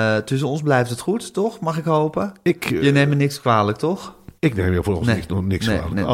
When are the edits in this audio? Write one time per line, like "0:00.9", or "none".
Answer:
0:04.4